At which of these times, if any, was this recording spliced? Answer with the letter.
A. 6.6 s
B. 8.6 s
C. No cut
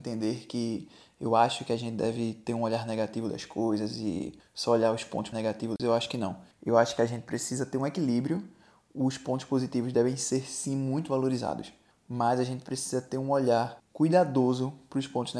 C